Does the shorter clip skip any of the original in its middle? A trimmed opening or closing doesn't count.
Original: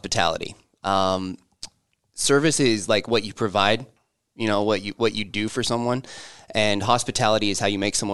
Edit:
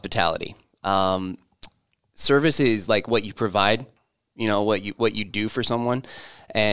no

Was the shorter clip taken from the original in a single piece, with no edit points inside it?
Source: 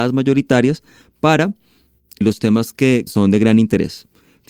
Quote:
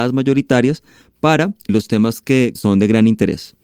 no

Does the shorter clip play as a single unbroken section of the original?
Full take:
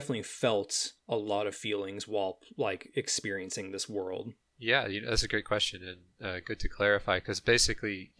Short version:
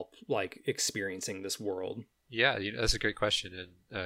yes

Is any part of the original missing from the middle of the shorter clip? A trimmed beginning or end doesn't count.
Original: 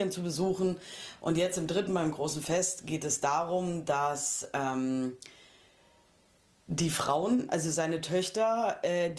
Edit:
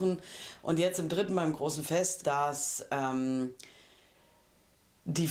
yes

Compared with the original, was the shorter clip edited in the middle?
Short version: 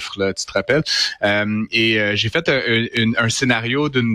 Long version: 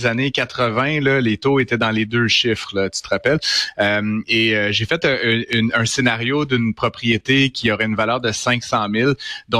no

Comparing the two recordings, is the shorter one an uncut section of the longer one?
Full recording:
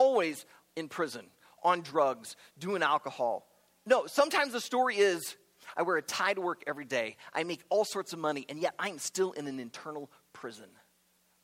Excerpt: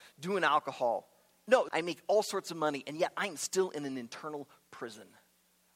no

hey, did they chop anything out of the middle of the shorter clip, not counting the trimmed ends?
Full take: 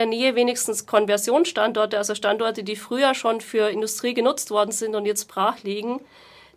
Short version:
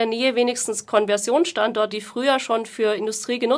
yes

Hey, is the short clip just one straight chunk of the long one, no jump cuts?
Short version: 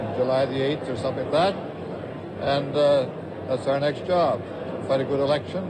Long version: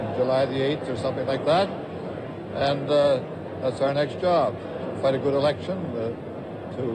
no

